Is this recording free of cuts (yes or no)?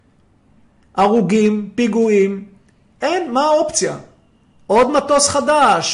yes